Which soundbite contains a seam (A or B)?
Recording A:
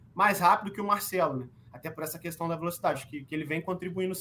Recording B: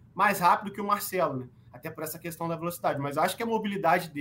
A